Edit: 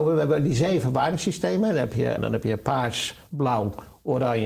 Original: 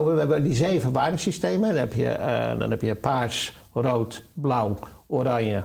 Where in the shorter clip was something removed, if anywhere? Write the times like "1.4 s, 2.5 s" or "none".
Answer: 2.2 s, 3.3 s